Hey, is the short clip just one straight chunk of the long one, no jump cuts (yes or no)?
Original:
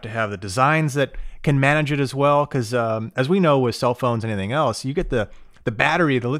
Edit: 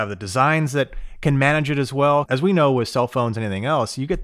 no